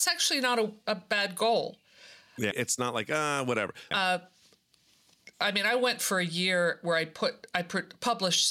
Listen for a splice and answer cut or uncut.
cut